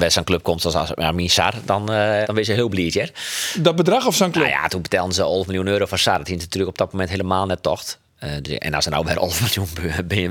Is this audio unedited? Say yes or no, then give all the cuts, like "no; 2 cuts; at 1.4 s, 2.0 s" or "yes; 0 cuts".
no; 1 cut; at 2.2 s